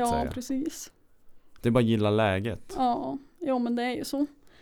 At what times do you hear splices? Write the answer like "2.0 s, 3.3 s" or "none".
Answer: none